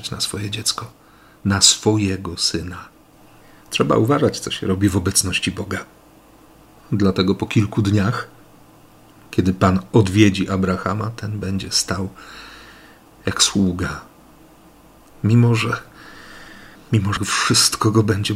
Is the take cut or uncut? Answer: uncut